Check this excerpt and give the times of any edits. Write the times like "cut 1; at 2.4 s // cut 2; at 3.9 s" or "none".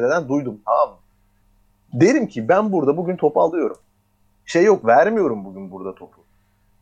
cut 1; at 1.9 s